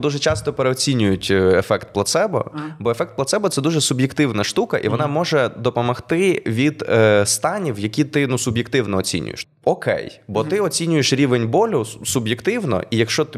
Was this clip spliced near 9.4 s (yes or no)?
yes